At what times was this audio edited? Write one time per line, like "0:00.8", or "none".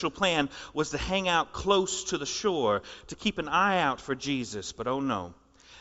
none